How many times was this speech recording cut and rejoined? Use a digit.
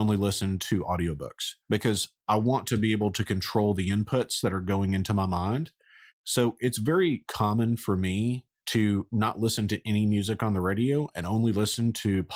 2